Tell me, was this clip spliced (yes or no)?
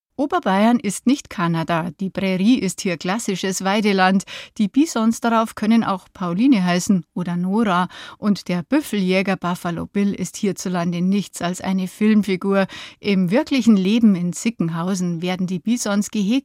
no